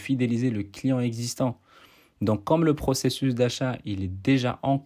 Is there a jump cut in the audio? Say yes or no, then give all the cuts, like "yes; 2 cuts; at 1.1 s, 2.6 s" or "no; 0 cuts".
no; 0 cuts